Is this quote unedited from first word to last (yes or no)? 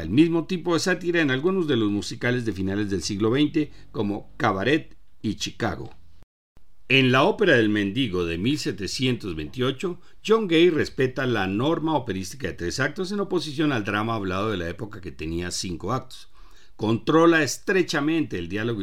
yes